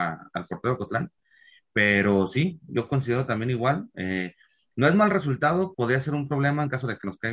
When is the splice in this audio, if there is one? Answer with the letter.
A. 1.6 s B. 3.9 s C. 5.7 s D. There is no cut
C